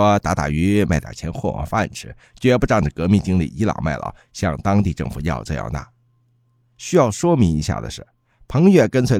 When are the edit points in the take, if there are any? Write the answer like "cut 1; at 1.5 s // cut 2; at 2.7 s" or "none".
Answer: none